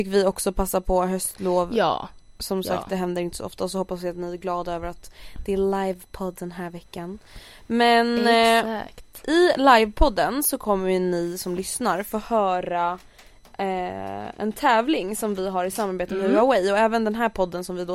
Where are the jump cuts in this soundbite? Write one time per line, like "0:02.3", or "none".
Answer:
none